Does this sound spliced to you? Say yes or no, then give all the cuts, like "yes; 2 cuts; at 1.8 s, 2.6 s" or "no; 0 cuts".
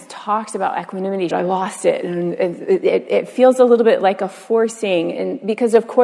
yes; 1 cut; at 1.3 s